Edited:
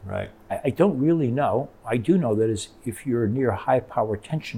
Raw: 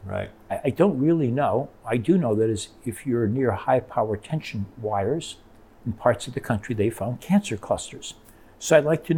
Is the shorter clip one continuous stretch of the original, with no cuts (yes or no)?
yes